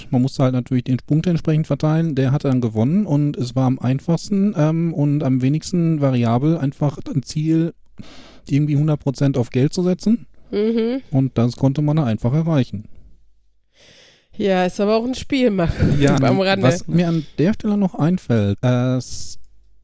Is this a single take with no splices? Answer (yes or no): no